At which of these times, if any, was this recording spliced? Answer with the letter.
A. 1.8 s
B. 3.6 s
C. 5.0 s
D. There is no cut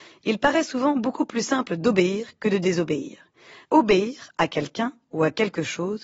B